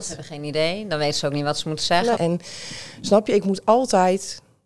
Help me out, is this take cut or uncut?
cut